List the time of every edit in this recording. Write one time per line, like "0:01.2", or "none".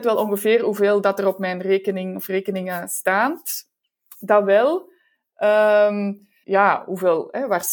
0:06.4